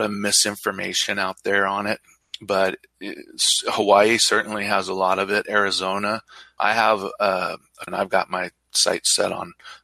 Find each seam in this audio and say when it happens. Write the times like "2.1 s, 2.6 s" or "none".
6.6 s, 7.9 s